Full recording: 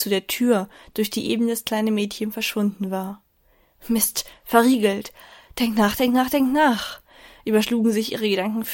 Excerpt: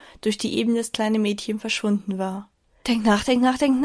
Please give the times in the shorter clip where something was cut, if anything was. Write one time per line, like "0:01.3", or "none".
0:02.8